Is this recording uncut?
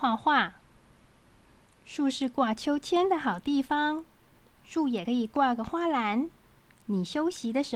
yes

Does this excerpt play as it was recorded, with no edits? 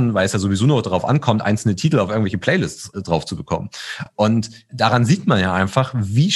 yes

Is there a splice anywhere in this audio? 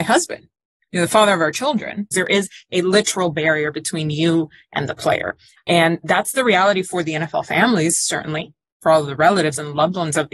yes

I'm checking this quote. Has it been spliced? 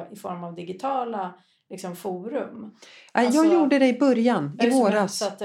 no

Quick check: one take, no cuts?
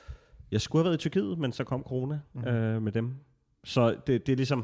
yes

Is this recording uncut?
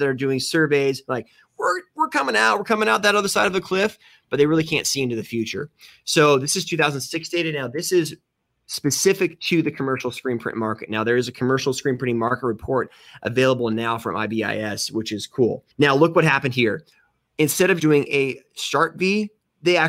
no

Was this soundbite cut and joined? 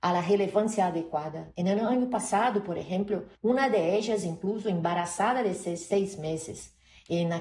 yes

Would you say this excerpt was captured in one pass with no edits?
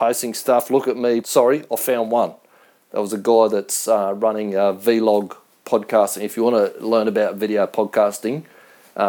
no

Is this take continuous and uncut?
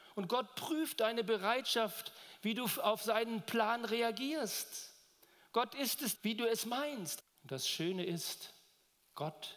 no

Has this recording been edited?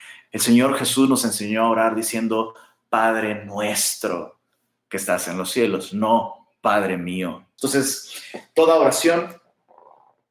yes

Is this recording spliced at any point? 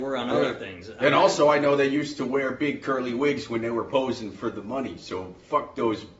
no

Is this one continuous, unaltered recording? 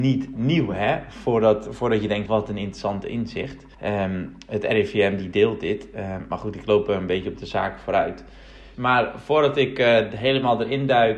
no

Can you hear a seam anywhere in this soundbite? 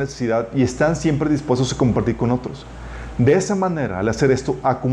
no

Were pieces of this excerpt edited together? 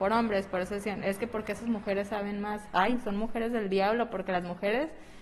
no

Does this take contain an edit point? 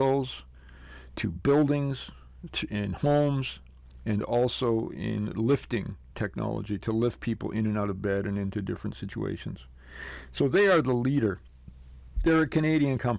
no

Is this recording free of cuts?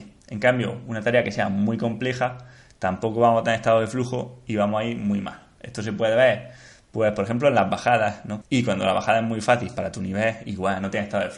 no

